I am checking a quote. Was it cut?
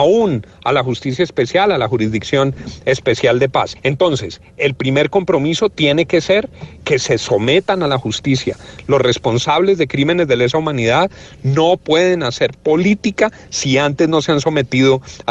no; 0 cuts

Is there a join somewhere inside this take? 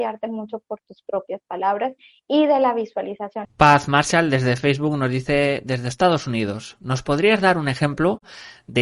yes; 1 cut; at 3.4 s

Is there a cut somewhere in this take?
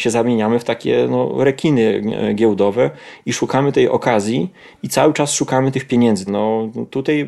yes; 1 cut; at 6.3 s

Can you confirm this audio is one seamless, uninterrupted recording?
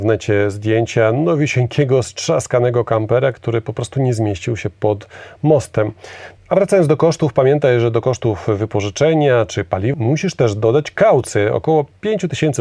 no; 2 cuts; at 6.4 s, 9.9 s

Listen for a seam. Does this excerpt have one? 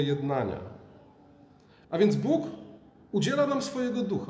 yes; 1 cut; at 1.8 s

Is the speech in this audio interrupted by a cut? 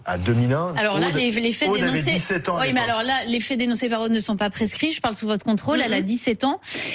no; 0 cuts

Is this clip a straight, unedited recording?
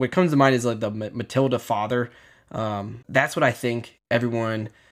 no; 1 cut; at 3.0 s

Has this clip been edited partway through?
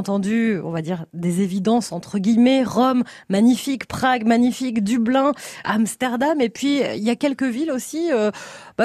yes; 1 cut; at 5.6 s

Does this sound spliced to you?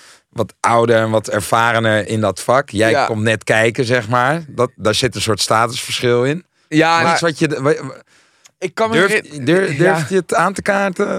yes; 1 cut; at 7.0 s

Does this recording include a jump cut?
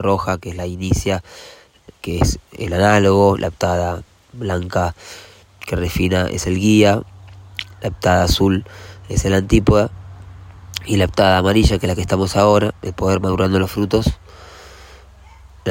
no; 0 cuts

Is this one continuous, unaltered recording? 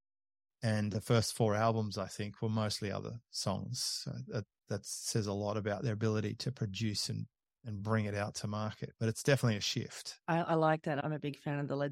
yes; 0 cuts

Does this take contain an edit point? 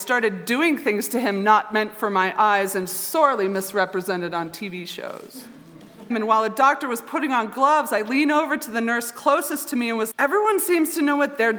yes; 2 cuts; at 6.1 s, 10.1 s

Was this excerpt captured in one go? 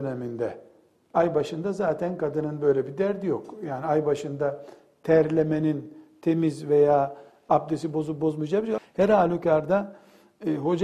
no; 1 cut; at 8.8 s

